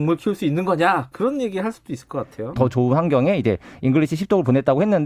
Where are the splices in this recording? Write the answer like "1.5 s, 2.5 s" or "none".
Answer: 1.1 s, 2.6 s